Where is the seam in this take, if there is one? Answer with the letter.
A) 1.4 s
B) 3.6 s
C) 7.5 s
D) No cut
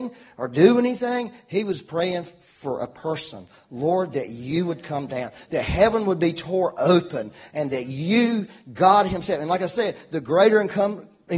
D